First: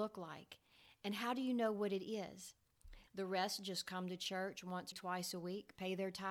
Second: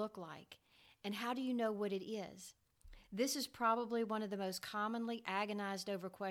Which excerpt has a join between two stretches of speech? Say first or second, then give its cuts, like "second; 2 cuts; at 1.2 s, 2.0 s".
first; 2 cuts; at 3.1 s, 4.9 s